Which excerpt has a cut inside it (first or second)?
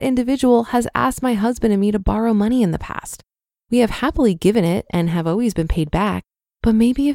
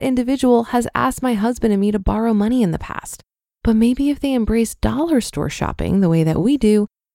second